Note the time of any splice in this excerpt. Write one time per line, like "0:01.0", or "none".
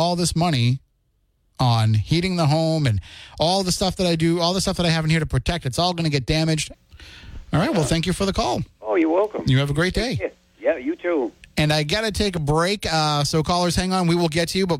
0:06.7